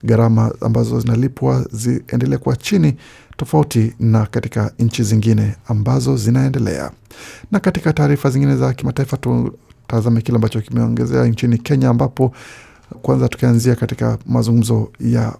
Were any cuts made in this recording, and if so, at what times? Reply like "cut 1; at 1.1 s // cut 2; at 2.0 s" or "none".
cut 1; at 12.9 s